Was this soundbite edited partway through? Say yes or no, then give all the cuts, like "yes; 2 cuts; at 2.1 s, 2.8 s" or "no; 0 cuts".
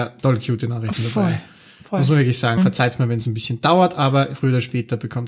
yes; 1 cut; at 2.6 s